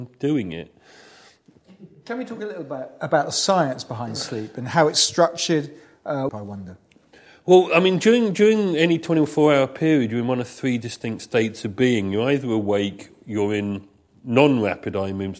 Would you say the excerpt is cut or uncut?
cut